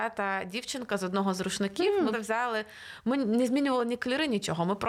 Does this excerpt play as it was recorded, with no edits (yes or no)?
no